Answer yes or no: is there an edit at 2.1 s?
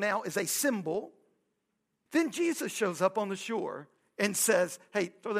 yes